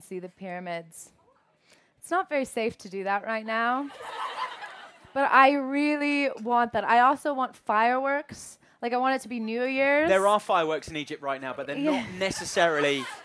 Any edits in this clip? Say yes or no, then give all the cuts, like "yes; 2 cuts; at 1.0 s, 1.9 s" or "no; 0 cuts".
no; 0 cuts